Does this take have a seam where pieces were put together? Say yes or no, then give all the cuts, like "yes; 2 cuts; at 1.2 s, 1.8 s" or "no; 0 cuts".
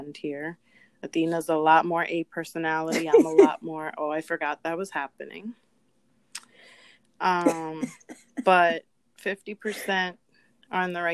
no; 0 cuts